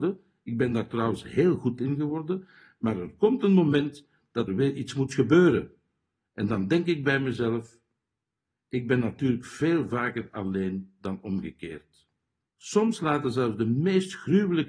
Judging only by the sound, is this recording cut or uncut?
cut